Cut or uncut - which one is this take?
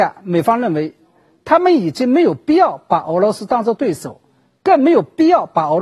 uncut